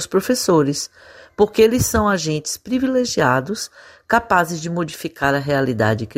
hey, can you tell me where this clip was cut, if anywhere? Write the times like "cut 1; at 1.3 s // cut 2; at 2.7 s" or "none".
none